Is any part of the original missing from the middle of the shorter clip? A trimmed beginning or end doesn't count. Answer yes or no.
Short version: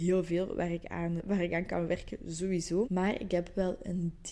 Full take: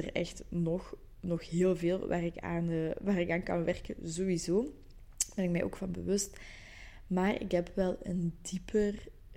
yes